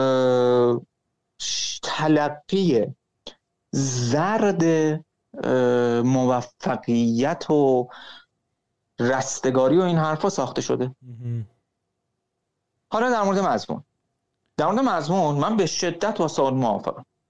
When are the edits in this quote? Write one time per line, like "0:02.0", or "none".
0:12.8

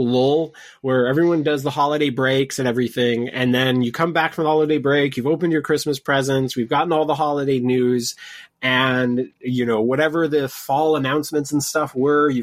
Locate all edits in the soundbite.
none

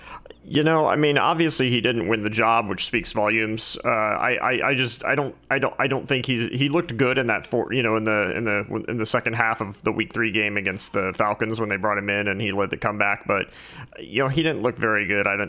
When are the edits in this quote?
none

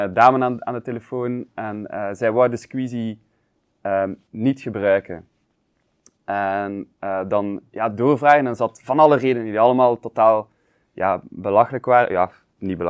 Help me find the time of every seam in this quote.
none

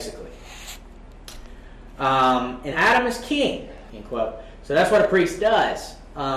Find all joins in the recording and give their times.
0:02.7
0:03.9

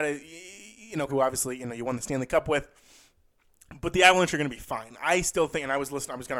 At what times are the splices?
0:01.1

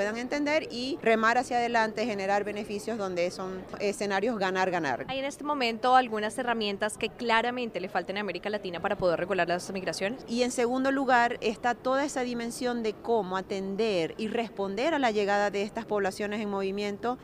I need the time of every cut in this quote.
0:05.1
0:10.3

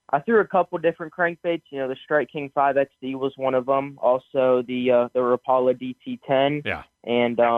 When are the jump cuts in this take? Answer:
none

